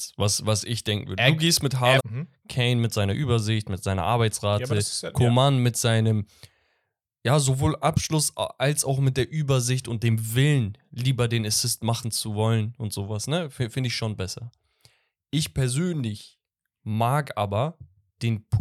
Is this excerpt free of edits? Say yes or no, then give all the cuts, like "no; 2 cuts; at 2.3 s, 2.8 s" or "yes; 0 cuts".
no; 1 cut; at 2.0 s